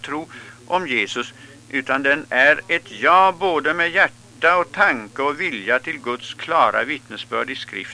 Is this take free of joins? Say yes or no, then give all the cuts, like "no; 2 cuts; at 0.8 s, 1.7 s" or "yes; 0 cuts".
yes; 0 cuts